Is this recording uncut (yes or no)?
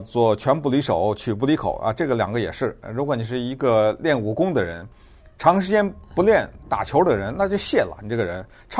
yes